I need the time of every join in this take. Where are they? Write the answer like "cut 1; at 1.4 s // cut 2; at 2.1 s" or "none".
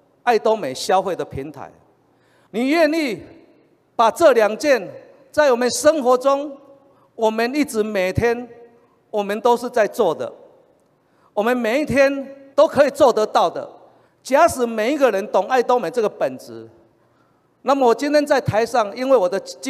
cut 1; at 2.5 s // cut 2; at 12.5 s // cut 3; at 14.1 s